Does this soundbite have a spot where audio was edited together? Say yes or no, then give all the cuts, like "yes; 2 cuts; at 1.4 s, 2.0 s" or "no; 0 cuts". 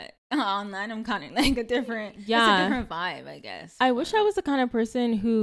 no; 0 cuts